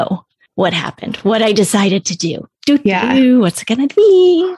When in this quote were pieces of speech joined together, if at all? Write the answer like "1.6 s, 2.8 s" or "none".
none